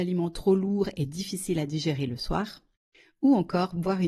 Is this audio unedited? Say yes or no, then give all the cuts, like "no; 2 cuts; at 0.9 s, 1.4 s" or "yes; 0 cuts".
yes; 0 cuts